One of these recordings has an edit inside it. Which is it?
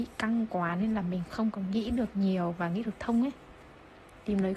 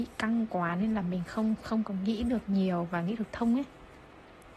first; 1 cut; at 1.3 s

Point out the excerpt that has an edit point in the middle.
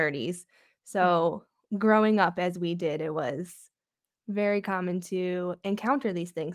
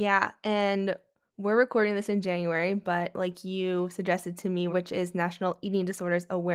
second; 1 cut; at 4.7 s

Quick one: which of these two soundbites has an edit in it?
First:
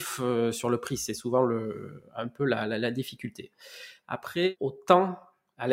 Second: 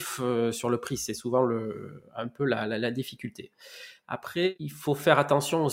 first; 1 cut; at 4.6 s

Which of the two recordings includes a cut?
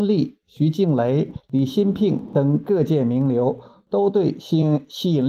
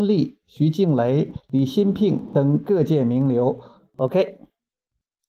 second; 1 cut; at 3.8 s

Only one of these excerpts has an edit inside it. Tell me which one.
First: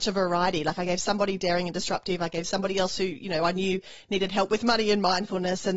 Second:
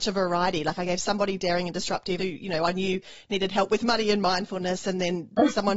second; 1 cut; at 2.2 s

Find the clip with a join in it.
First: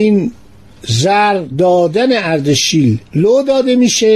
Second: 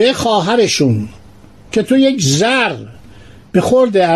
first; 1 cut; at 3.1 s

